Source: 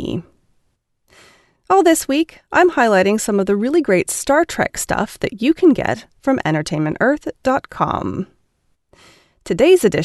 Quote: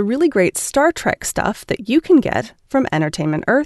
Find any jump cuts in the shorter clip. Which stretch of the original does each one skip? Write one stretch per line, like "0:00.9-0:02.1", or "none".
none